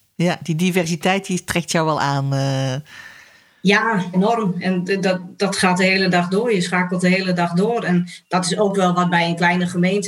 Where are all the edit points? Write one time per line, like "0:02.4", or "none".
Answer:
0:04.1